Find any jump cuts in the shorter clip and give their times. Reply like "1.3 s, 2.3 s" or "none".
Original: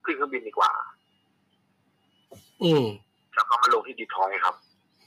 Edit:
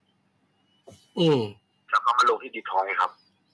none